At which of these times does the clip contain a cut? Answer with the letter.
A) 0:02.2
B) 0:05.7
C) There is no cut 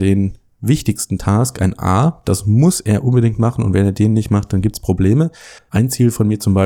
B